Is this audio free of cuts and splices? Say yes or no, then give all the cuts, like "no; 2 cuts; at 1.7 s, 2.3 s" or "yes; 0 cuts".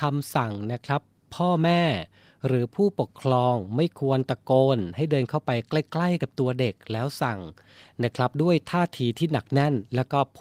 yes; 0 cuts